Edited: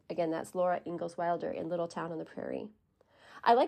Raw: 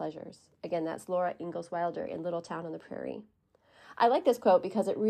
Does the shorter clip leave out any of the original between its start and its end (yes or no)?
no